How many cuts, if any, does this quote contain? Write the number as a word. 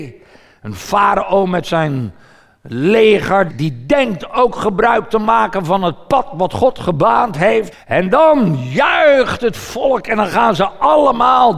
two